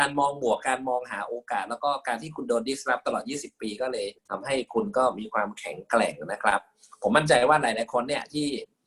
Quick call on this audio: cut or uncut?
cut